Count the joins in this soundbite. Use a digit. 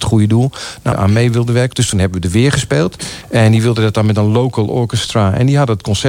2